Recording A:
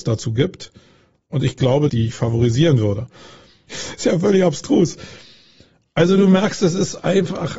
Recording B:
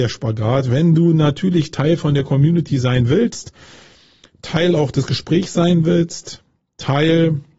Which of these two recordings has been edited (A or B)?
A